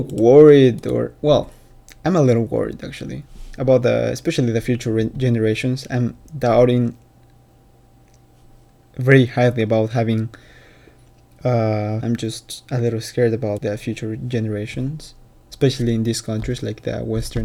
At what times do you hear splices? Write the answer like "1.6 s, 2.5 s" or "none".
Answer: 12.0 s, 13.6 s